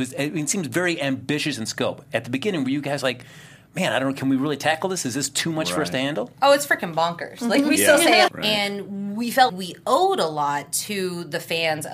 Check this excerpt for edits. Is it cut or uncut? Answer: cut